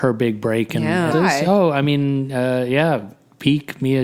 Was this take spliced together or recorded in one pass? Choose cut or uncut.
cut